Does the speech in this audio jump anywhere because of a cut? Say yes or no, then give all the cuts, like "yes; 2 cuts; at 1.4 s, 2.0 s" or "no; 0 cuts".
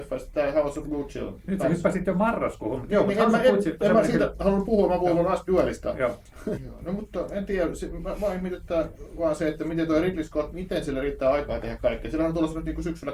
yes; 3 cuts; at 3.8 s, 6.6 s, 10.5 s